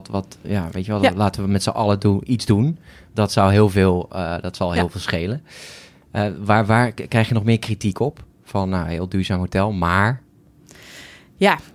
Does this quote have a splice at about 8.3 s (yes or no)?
no